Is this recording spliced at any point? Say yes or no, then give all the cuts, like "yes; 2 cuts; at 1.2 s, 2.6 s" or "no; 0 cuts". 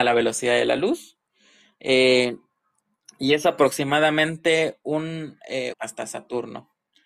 yes; 1 cut; at 5.7 s